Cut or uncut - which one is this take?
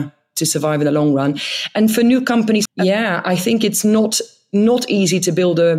cut